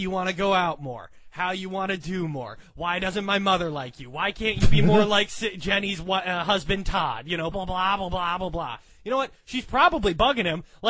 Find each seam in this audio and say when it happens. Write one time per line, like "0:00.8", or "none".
0:07.5